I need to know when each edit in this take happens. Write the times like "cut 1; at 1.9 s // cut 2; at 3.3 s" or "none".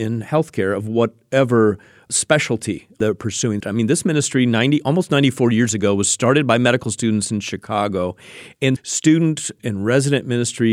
cut 1; at 3.6 s // cut 2; at 8.8 s